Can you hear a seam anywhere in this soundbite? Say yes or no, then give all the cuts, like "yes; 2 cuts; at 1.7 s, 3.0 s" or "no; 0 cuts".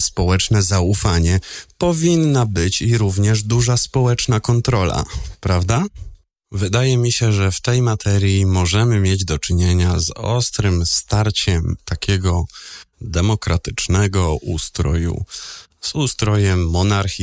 no; 0 cuts